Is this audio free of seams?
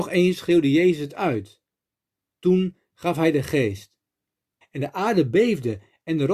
no; 1 cut; at 4.6 s

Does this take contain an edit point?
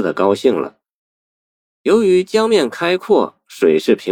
no; 0 cuts

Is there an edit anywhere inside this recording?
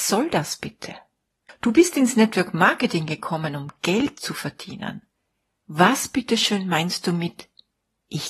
no; 0 cuts

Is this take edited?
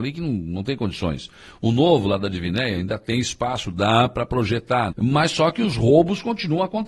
yes; 1 cut; at 4.9 s

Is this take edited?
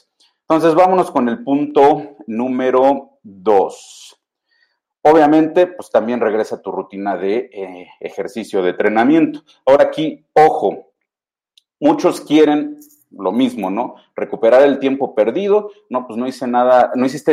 no; 0 cuts

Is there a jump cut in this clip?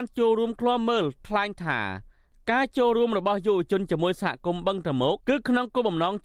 yes; 1 cut; at 5.2 s

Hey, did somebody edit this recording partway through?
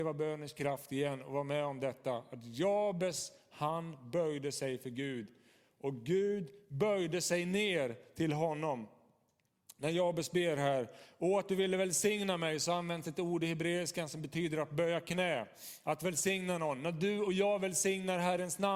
no; 0 cuts

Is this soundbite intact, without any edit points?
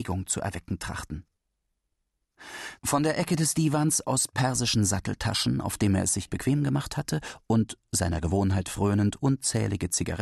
no; 1 cut; at 2.8 s

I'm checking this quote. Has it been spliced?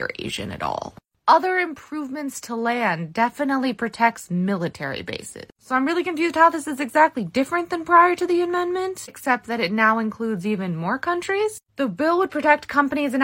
yes; 2 cuts; at 1.1 s, 5.5 s

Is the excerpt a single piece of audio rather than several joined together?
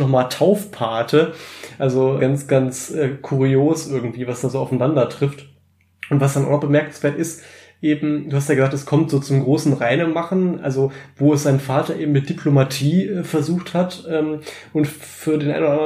no; 1 cut; at 2.2 s

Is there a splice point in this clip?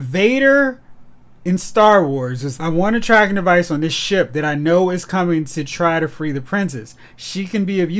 yes; 1 cut; at 2.6 s

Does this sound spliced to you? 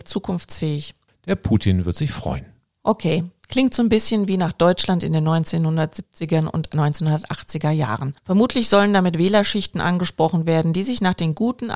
yes; 2 cuts; at 1.1 s, 8.2 s

